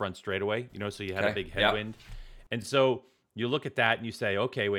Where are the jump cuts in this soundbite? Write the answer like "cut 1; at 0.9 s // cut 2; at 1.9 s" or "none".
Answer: none